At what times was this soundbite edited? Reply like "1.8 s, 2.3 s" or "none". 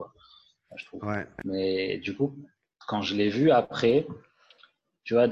none